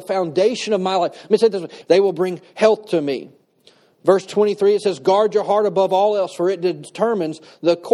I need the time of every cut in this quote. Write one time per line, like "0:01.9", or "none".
0:01.8